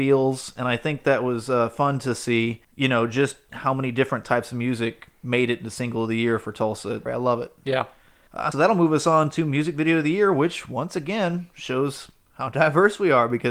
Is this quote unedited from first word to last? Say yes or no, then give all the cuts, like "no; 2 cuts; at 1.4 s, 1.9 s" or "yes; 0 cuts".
no; 3 cuts; at 2.6 s, 7.1 s, 8.5 s